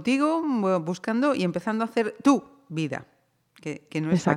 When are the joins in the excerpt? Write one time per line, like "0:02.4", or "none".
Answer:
none